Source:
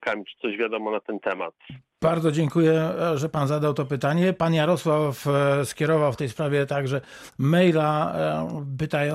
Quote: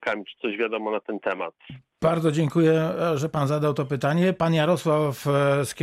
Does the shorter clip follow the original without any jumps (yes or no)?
yes